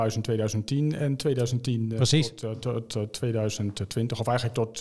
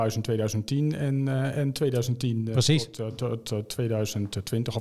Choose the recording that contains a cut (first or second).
first